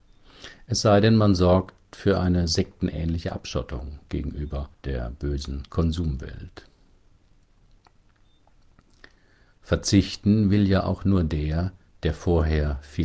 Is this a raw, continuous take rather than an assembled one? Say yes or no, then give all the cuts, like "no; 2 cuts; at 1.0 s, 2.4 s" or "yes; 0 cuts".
no; 1 cut; at 4.7 s